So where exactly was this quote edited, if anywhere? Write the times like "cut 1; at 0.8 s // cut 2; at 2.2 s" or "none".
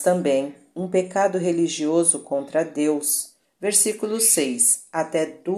cut 1; at 3.4 s